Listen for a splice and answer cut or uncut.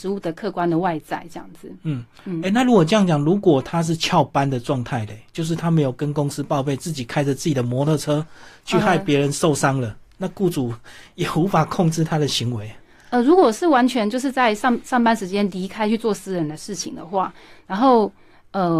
uncut